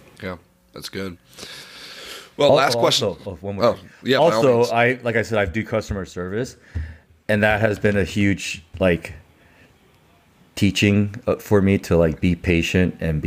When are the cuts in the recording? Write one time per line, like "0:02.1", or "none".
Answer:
none